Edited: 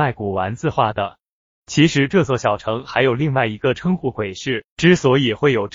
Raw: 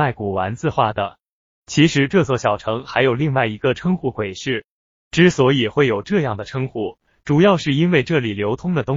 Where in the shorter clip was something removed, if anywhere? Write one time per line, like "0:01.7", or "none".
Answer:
0:04.7